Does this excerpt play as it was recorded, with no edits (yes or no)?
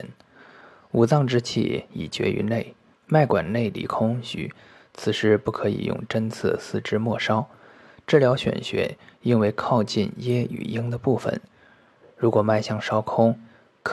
no